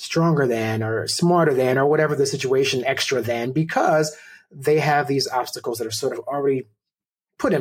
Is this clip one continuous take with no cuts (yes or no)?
yes